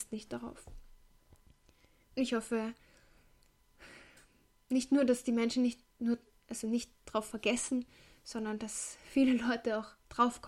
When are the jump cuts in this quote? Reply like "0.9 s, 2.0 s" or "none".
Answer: none